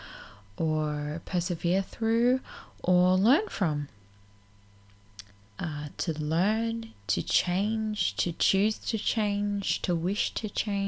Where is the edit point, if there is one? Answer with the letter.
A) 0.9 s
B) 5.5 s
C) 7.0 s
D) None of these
B